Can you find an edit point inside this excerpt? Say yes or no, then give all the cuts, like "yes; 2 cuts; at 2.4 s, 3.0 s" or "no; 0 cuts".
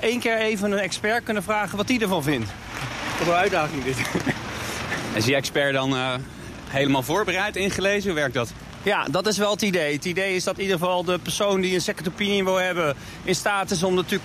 no; 0 cuts